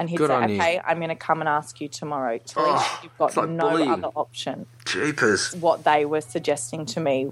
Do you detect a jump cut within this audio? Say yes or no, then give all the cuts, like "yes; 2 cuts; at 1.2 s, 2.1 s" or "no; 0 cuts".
yes; 1 cut; at 5.5 s